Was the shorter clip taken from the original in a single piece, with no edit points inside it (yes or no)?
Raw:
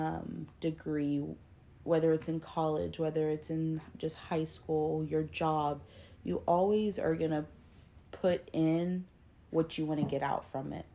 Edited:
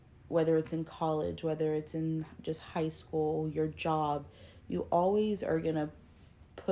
yes